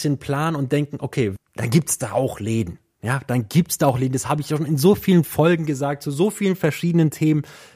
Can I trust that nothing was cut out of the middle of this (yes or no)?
no